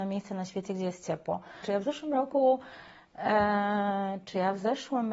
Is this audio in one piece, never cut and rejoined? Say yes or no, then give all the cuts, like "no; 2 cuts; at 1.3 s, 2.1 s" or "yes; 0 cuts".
no; 1 cut; at 1.6 s